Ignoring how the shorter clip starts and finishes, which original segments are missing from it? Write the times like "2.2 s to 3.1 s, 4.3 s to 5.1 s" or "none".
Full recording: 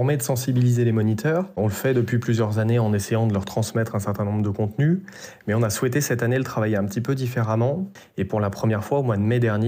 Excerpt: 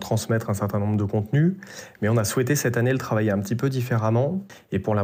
none